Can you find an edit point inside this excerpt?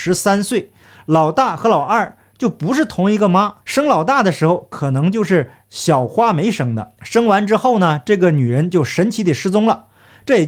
yes; 1 cut; at 3.6 s

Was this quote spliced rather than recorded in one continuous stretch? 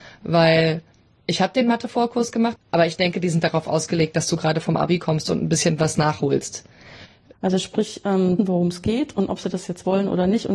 yes; 3 cuts; at 2.6 s, 7.3 s, 8.4 s

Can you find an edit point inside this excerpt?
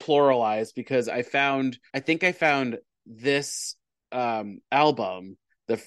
yes; 1 cut; at 1.9 s

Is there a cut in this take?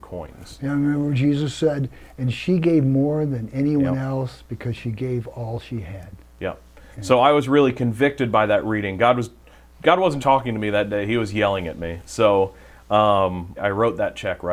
yes; 2 cuts; at 10.2 s, 13.6 s

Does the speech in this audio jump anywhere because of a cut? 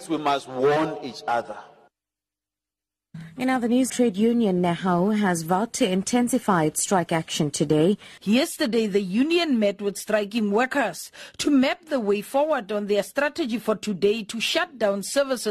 yes; 2 cuts; at 3.9 s, 8.2 s

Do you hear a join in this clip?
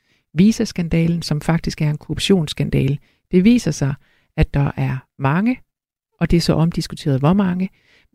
no; 0 cuts

